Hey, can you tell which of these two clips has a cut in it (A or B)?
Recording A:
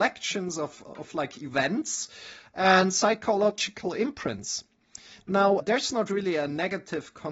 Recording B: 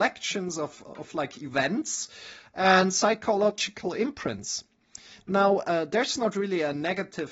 A